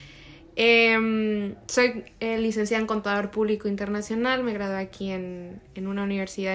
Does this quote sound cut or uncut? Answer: uncut